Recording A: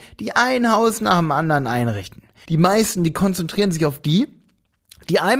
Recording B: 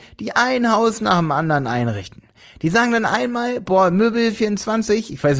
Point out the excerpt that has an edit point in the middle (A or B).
A